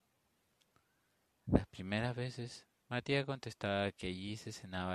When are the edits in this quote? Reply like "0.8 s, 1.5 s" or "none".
none